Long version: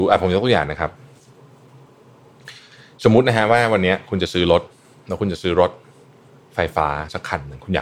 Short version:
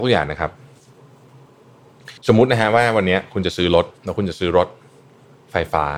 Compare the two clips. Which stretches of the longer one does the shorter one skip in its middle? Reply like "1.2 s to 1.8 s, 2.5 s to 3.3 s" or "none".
2.6 s to 2.9 s, 4.7 s to 5.0 s